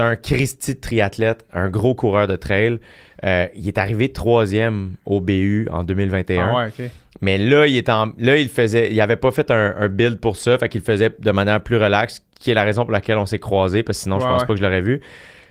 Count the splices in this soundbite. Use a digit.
0